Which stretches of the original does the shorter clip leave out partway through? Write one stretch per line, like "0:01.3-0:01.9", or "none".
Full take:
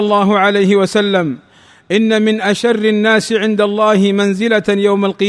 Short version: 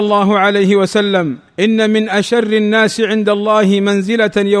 0:01.5-0:01.8